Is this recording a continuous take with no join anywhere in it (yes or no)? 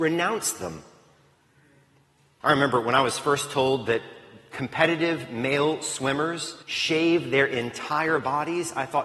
no